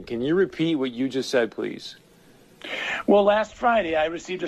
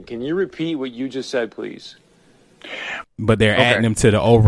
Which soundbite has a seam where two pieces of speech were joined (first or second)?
second